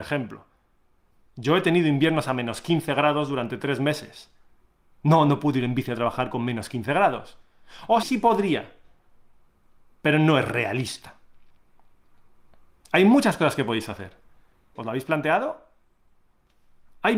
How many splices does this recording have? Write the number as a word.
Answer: two